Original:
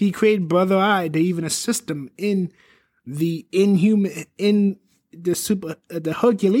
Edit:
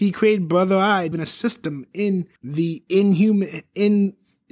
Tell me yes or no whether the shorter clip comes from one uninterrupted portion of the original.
no